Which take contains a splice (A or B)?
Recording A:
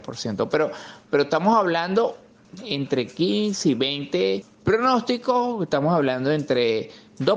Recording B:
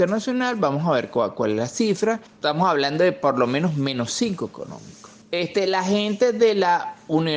B